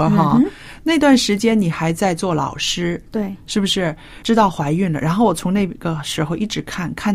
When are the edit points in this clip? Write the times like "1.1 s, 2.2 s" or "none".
4.2 s

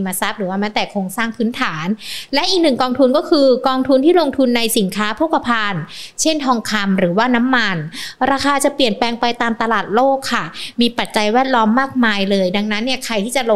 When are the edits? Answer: none

